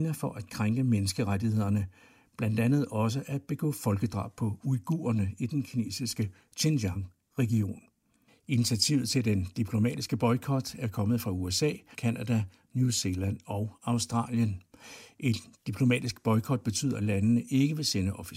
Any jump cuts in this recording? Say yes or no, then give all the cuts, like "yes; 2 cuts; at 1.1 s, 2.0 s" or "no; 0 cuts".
yes; 2 cuts; at 8.3 s, 11.9 s